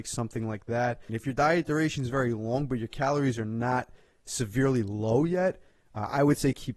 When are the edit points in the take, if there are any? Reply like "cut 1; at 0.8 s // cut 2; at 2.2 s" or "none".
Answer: cut 1; at 1.1 s